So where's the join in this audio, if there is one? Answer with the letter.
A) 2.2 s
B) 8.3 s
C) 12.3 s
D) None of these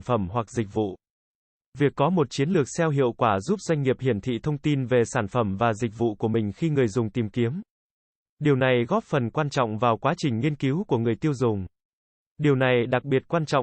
C